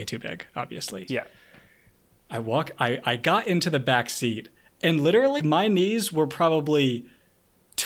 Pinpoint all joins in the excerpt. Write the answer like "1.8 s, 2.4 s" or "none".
1.1 s, 5.4 s